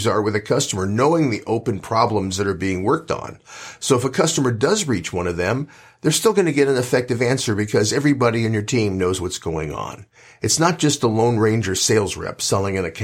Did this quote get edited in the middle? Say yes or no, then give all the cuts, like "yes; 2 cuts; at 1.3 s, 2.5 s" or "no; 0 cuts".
no; 0 cuts